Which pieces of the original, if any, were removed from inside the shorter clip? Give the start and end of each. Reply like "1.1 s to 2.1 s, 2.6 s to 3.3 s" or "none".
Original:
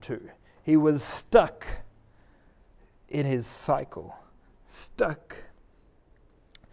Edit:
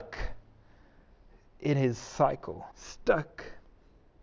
4.2 s to 4.6 s